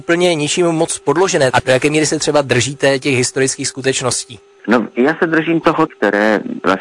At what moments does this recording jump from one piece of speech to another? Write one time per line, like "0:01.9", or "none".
0:01.5
0:05.9